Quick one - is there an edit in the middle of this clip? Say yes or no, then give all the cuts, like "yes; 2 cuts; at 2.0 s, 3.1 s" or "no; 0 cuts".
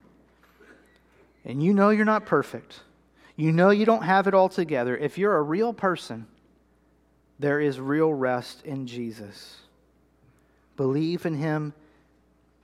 no; 0 cuts